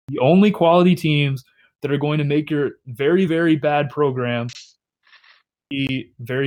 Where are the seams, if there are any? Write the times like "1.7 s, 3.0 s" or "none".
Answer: none